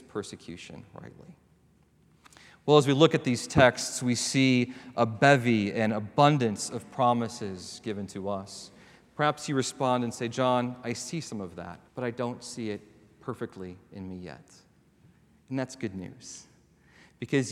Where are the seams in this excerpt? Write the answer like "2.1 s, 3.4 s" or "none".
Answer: 11.9 s